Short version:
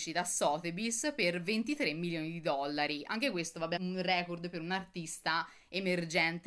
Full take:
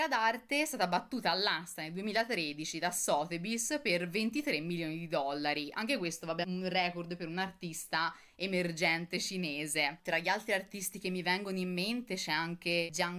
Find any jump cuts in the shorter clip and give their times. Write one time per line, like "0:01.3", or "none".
none